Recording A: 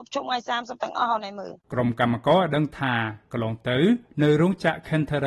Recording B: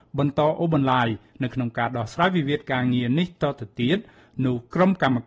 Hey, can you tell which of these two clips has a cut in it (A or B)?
A